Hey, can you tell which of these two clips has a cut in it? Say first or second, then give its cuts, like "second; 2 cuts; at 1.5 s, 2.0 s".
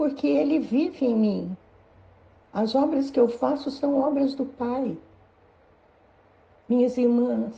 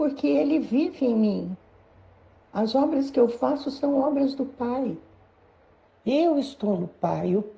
second; 1 cut; at 5.9 s